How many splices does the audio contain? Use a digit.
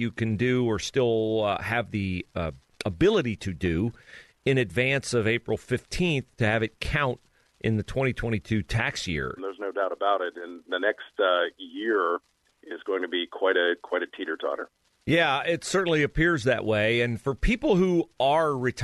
1